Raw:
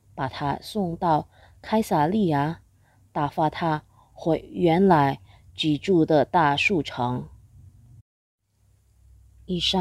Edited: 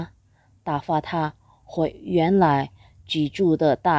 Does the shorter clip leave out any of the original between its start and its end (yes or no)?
no